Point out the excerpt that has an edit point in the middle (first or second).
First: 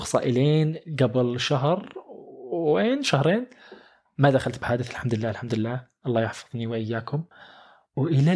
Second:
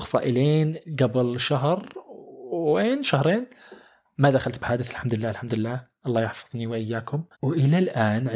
second